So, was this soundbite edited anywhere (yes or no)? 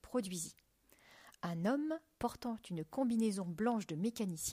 no